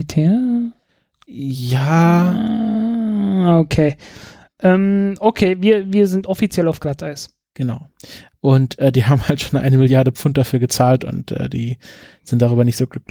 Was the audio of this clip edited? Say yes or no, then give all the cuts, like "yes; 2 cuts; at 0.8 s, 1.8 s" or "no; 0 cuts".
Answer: yes; 1 cut; at 8.3 s